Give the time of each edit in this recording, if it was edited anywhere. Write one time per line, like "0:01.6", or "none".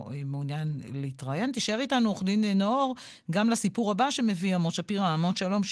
none